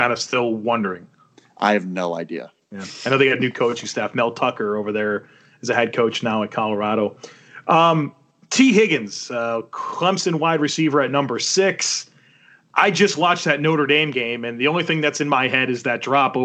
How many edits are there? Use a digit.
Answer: 0